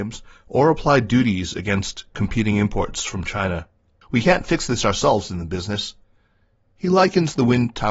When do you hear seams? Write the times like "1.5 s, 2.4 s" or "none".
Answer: 4.0 s